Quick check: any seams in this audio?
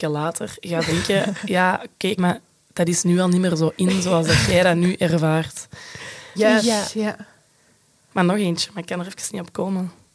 yes; 2 cuts; at 2.2 s, 6.4 s

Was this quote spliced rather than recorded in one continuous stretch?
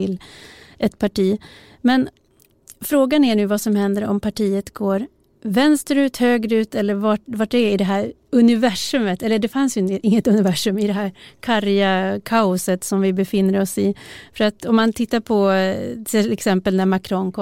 no; 0 cuts

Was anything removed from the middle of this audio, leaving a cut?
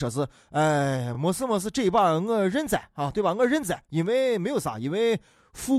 no; 0 cuts

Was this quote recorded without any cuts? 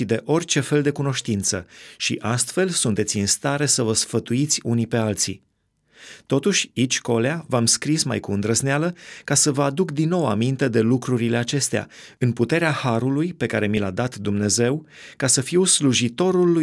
yes; 0 cuts

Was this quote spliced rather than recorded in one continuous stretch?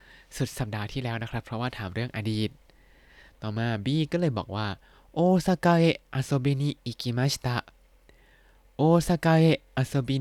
no; 0 cuts

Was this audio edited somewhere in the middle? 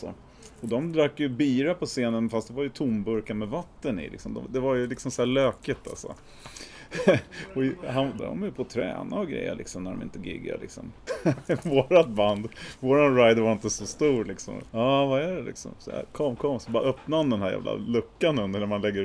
yes; 3 cuts; at 8.2 s, 11.1 s, 14.7 s

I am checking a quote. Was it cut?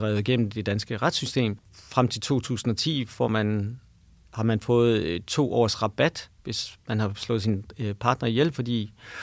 yes; 1 cut; at 1.6 s

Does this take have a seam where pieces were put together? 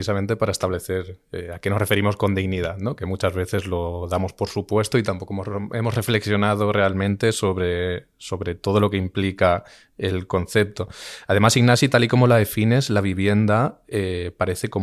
no; 0 cuts

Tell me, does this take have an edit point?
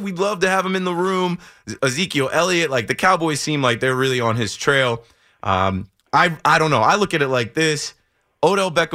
no; 0 cuts

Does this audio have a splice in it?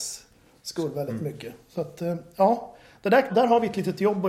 yes; 1 cut; at 3.3 s

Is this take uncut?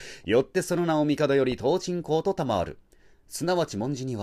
yes; 0 cuts

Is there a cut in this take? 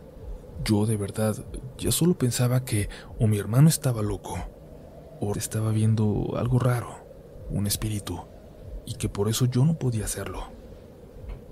yes; 1 cut; at 5.3 s

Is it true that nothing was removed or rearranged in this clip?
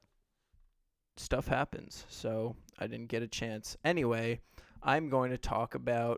yes; 0 cuts

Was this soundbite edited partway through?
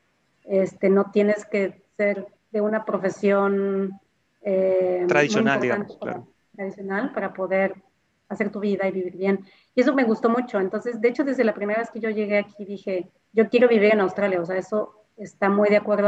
no; 0 cuts

